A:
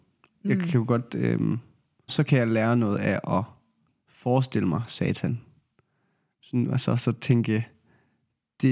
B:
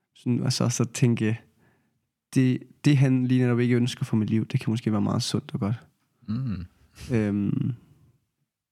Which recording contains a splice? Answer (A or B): A